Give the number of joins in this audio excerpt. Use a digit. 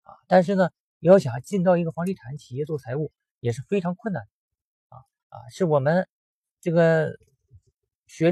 1